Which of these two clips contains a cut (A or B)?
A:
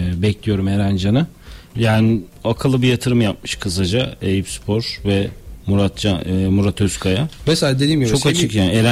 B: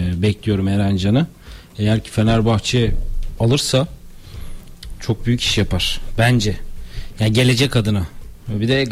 A